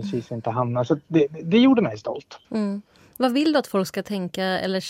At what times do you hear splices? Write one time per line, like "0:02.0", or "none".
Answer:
0:02.4